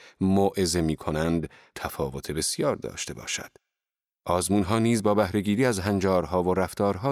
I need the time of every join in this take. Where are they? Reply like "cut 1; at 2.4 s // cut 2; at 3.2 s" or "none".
cut 1; at 4.2 s

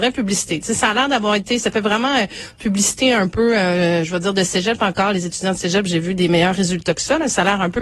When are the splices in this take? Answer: none

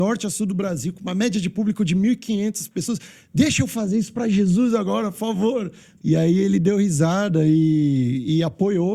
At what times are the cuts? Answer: cut 1; at 6.0 s

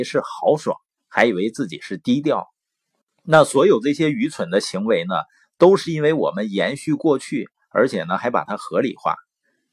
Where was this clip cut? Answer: cut 1; at 1.0 s

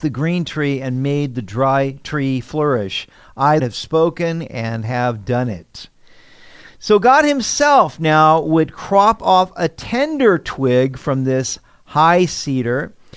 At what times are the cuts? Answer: cut 1; at 3.6 s

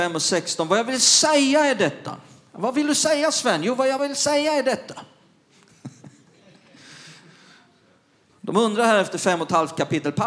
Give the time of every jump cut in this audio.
cut 1; at 4.0 s

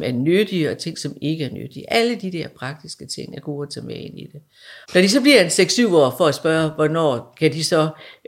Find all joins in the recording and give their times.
cut 1; at 4.8 s

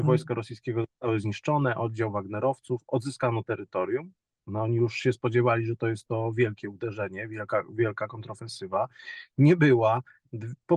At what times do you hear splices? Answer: cut 1; at 4.5 s

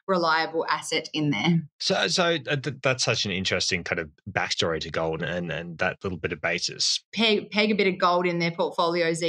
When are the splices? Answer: cut 1; at 1.7 s // cut 2; at 5.2 s // cut 3; at 7.0 s

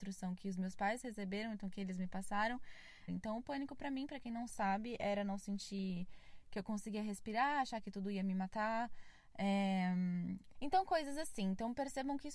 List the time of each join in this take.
cut 1; at 3.1 s // cut 2; at 10.5 s

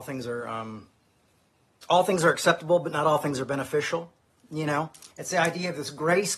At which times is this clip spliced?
cut 1; at 5.1 s

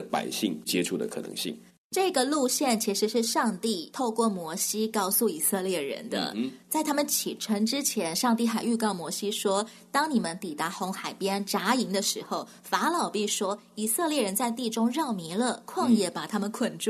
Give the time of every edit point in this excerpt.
none

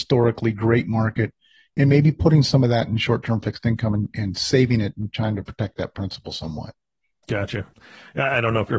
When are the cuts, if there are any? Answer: none

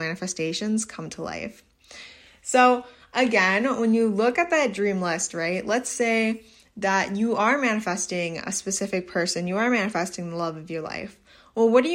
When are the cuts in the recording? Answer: none

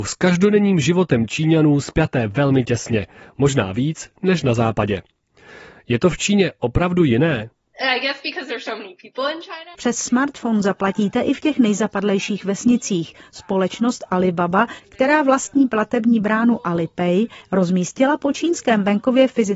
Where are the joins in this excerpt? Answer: cut 1; at 9.7 s

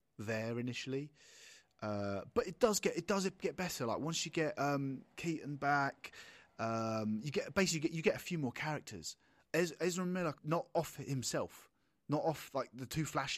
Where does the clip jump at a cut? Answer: cut 1; at 10.4 s

